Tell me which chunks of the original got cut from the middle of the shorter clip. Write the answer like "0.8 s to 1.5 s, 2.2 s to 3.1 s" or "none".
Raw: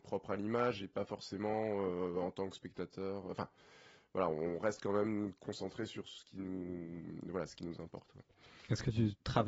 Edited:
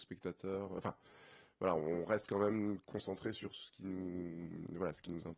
none